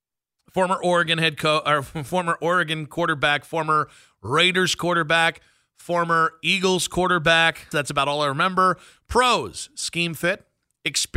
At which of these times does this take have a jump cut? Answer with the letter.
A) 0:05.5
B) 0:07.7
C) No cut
B